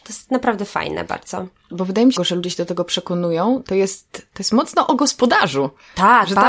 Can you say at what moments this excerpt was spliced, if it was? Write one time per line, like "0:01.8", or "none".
0:02.2